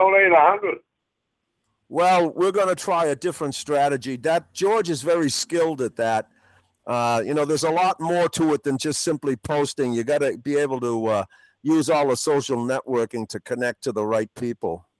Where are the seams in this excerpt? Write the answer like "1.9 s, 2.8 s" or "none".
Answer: none